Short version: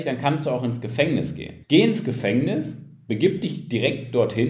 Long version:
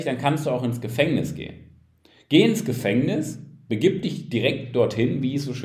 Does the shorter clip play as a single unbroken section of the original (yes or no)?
no